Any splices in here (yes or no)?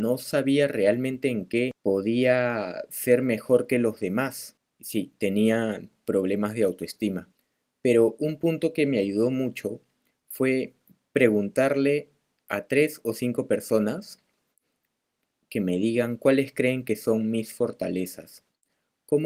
no